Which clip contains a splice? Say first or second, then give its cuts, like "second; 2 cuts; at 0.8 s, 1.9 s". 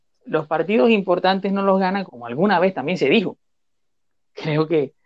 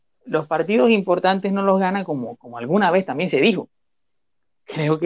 first; 1 cut; at 2.1 s